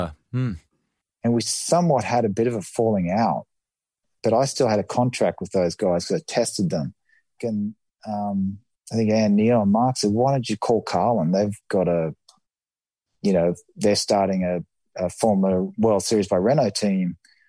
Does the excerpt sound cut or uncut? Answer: cut